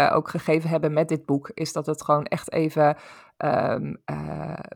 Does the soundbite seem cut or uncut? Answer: uncut